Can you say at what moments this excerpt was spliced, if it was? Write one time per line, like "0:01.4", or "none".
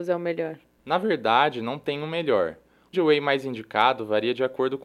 0:02.9